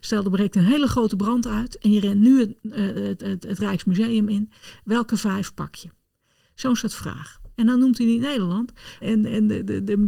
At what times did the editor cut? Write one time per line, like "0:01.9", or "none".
0:07.5
0:09.0